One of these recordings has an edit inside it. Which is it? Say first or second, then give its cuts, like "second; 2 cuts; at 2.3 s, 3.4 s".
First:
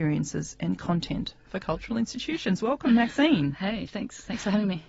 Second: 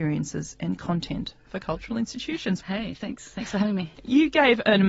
second; 1 cut; at 2.6 s